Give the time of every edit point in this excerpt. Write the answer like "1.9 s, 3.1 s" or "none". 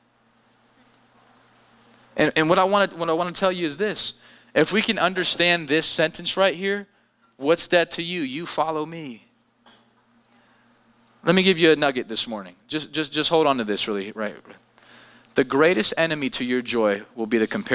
none